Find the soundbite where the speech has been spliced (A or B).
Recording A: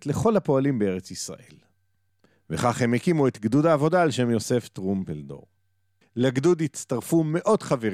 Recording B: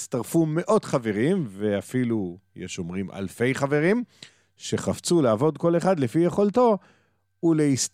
A